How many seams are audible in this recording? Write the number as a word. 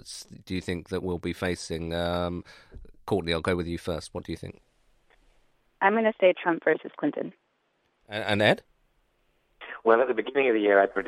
zero